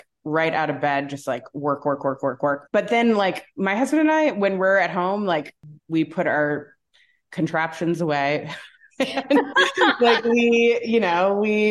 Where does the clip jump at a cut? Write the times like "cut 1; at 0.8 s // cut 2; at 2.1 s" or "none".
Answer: cut 1; at 2.7 s // cut 2; at 5.8 s